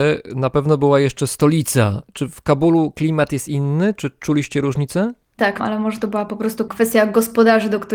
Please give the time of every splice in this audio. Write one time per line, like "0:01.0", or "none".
0:05.6